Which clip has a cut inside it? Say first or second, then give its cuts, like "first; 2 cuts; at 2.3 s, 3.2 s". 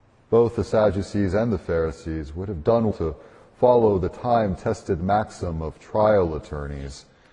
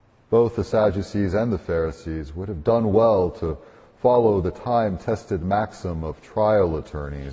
first; 1 cut; at 2.9 s